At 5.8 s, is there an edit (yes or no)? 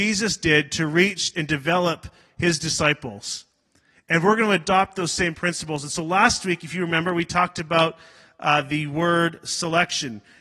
no